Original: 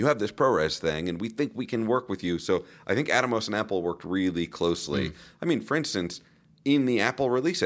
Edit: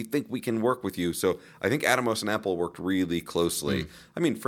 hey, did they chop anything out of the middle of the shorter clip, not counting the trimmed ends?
no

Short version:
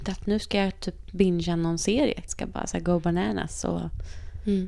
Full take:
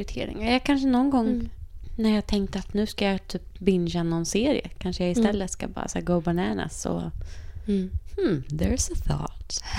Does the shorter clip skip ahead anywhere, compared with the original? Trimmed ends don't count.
yes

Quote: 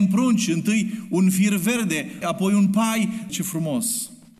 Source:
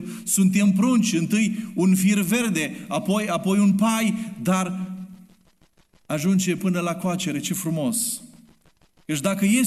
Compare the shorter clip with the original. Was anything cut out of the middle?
yes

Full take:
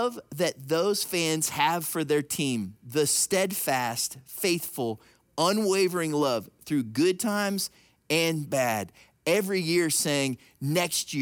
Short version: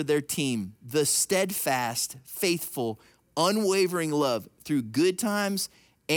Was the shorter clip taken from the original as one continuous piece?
yes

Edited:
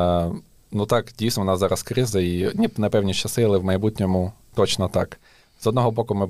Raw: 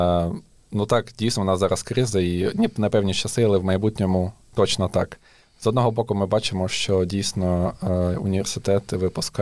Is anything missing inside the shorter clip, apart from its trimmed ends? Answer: no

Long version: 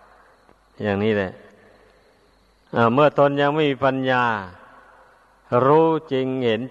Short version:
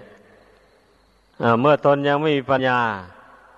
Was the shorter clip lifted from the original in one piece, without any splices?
no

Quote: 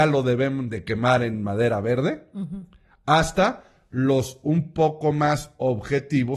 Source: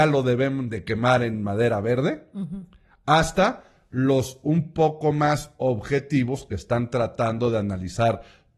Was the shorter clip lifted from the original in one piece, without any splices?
yes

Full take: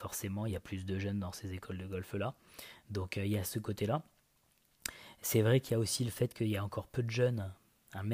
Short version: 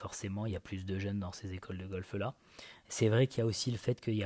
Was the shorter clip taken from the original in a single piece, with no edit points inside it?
no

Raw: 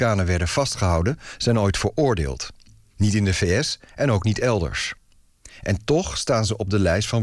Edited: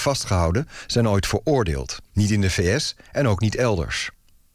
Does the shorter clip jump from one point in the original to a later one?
yes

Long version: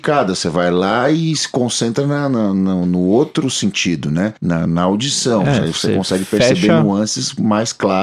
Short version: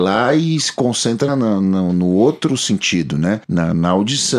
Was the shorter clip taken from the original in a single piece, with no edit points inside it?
no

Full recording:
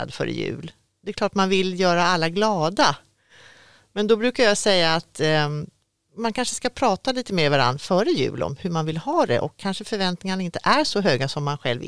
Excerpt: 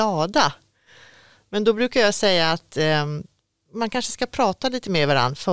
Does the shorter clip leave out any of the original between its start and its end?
no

